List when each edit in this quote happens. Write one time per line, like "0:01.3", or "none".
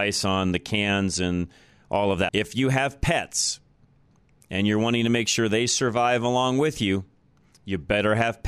0:02.3